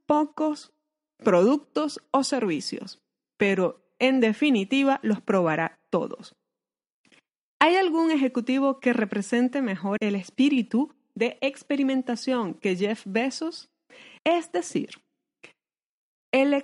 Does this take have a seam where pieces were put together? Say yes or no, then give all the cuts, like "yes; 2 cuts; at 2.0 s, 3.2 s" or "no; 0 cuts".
yes; 2 cuts; at 10.0 s, 14.2 s